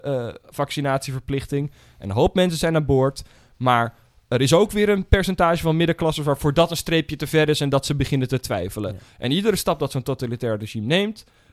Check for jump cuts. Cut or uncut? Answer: uncut